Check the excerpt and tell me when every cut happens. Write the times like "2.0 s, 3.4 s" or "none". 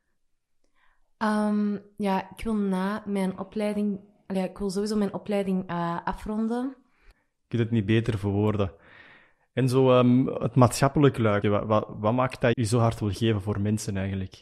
7.1 s, 11.4 s, 12.5 s